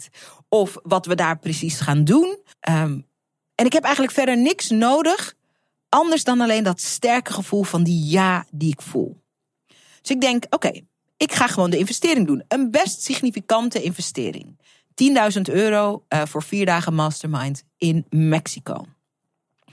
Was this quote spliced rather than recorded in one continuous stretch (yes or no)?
yes